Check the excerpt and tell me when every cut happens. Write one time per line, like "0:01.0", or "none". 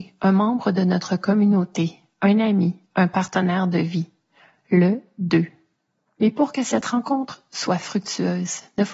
none